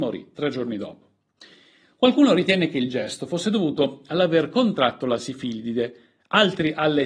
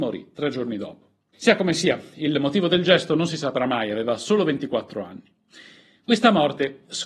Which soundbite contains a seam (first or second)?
second